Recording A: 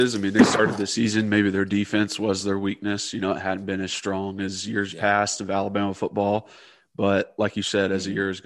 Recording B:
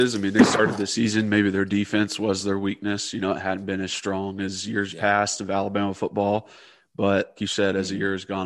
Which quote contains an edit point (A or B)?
B